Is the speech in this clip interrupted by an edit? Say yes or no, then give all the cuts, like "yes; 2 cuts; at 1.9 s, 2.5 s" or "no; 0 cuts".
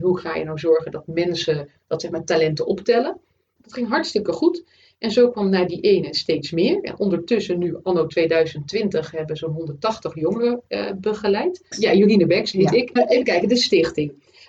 yes; 3 cuts; at 3.6 s, 11.7 s, 13.0 s